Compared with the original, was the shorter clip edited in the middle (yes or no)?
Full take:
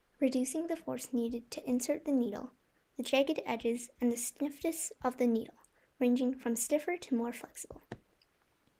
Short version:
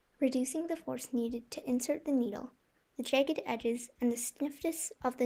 no